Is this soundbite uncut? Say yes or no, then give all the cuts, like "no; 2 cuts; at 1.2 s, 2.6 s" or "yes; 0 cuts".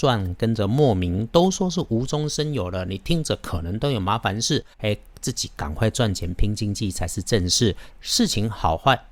no; 2 cuts; at 4.7 s, 7.9 s